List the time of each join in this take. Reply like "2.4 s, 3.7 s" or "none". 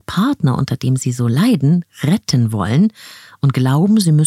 none